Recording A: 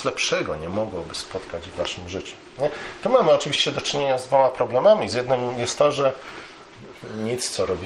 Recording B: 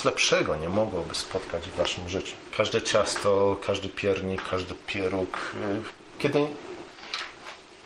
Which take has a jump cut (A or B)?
B